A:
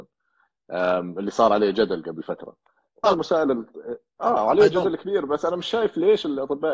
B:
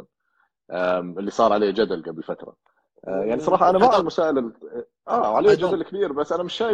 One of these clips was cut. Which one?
A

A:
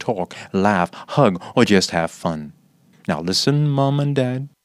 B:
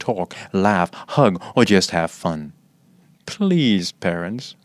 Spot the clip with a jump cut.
A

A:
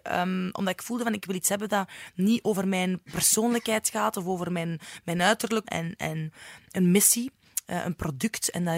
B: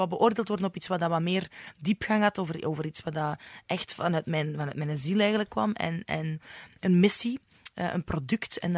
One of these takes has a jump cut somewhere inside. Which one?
A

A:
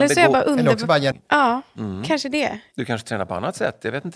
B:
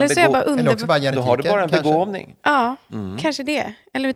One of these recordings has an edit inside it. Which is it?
A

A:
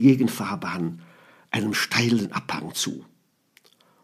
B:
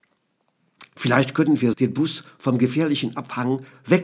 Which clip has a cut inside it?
B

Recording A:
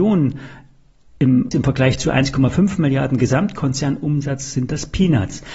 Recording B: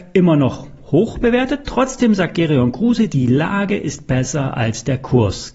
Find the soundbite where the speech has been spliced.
A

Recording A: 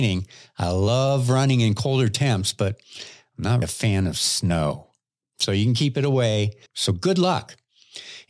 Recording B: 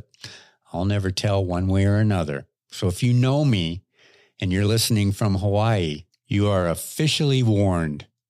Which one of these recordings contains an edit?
A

